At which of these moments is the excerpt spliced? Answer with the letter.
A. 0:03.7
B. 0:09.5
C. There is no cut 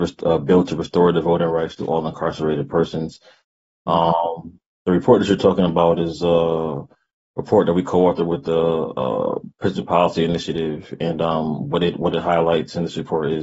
A